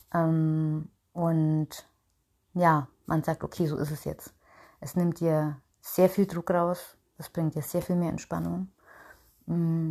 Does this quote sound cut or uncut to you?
uncut